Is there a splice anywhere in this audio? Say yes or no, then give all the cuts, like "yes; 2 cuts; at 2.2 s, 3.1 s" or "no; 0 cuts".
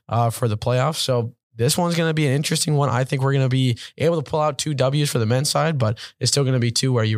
no; 0 cuts